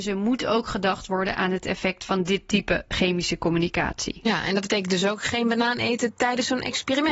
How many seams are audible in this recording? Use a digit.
0